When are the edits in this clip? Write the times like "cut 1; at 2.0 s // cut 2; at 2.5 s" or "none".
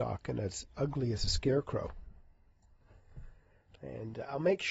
cut 1; at 3.8 s